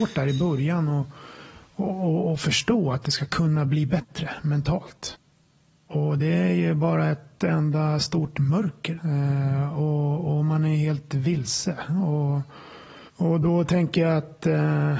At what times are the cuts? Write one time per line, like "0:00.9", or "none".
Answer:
0:09.0
0:13.1